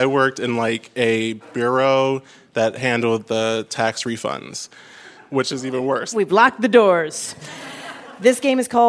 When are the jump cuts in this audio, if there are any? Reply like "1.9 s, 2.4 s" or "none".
6.1 s